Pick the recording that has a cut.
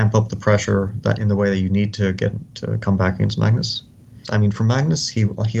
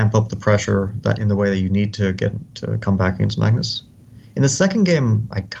first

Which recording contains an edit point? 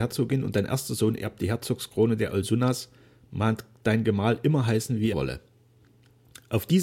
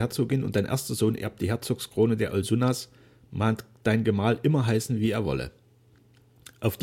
first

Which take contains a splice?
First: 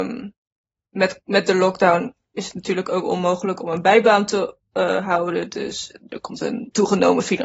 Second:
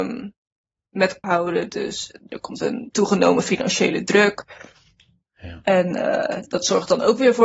second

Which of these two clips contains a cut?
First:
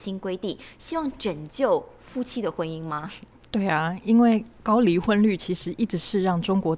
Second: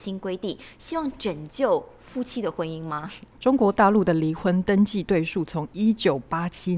second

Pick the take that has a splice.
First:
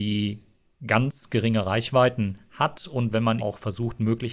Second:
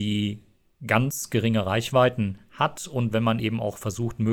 first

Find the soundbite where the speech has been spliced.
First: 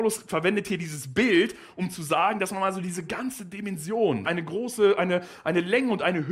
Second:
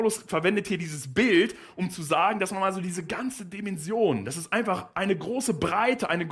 first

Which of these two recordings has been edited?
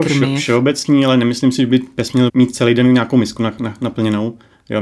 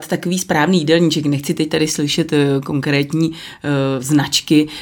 first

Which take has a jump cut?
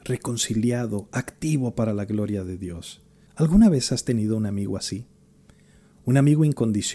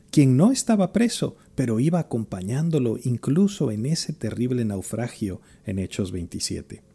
first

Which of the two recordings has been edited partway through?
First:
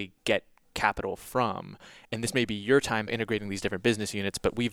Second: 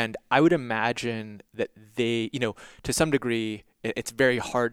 first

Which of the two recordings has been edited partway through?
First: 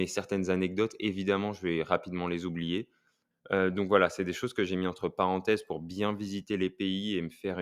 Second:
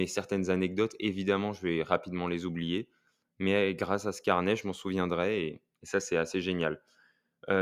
first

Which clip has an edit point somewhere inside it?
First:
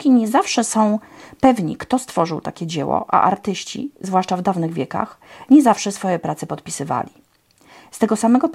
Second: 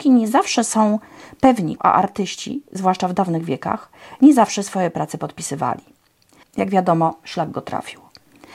second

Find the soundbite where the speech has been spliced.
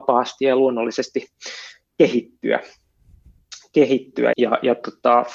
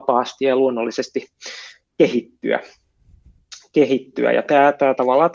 first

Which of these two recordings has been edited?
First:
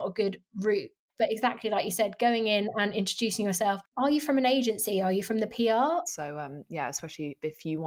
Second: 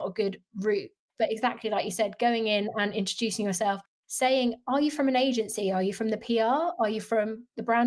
first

